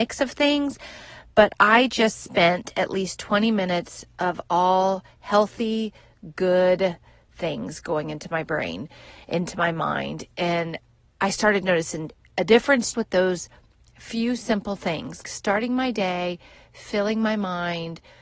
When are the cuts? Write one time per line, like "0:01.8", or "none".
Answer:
0:12.9
0:15.2